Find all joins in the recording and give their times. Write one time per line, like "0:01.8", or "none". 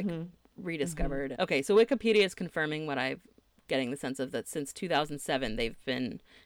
0:01.3